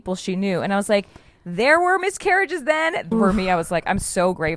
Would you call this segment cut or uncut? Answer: cut